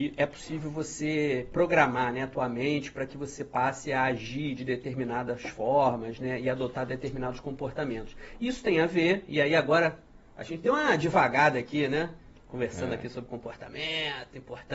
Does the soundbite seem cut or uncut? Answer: uncut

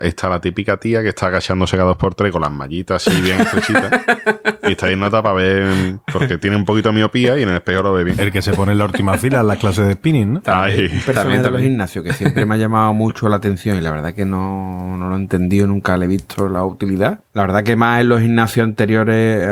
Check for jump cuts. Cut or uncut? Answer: uncut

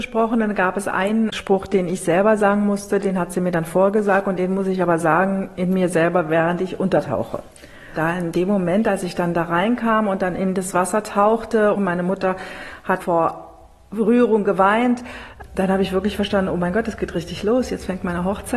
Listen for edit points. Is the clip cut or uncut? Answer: uncut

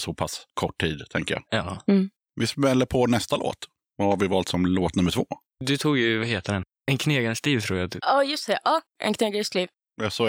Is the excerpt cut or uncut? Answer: uncut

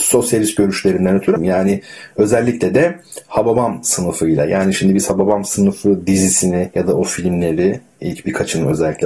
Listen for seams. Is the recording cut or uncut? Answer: cut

